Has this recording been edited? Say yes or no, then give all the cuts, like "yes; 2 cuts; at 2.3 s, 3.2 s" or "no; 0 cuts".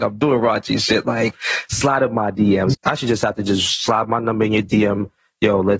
yes; 1 cut; at 2.7 s